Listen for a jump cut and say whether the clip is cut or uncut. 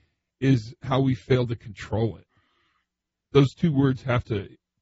cut